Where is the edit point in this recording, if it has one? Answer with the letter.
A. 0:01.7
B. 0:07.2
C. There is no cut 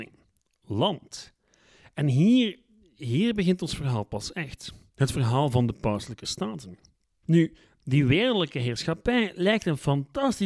B